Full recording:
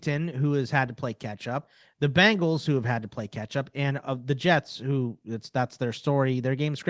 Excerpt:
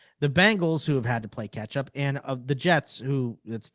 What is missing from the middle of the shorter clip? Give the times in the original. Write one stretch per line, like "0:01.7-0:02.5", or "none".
none